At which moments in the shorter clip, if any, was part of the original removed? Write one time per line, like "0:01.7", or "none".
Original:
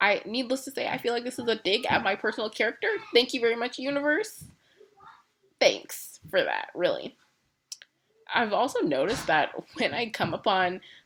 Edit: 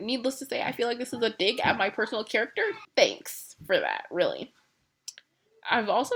0:02.8